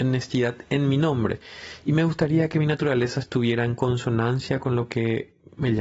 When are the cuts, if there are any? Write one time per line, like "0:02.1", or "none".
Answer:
none